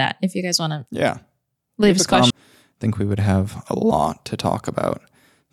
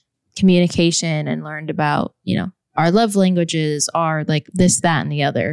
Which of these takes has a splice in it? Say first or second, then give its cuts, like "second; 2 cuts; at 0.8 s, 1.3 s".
first; 1 cut; at 2.3 s